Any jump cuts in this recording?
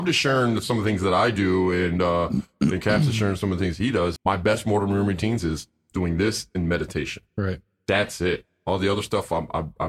yes; 1 cut; at 4.2 s

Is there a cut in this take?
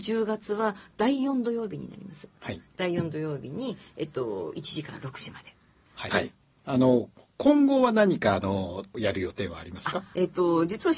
yes; 1 cut; at 6.1 s

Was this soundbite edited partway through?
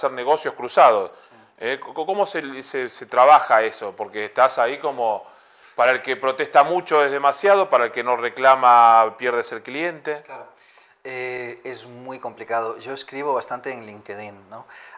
no; 0 cuts

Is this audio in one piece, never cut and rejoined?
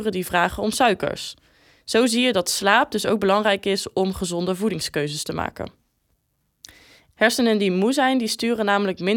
no; 1 cut; at 7.1 s

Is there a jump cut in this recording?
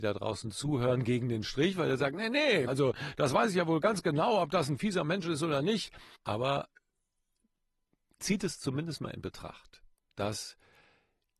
yes; 2 cuts; at 2.7 s, 6.1 s

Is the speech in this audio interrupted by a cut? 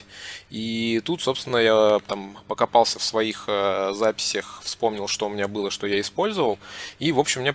no; 0 cuts

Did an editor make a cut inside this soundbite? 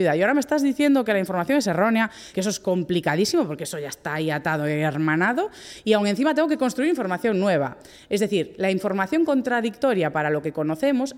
yes; 1 cut; at 2.3 s

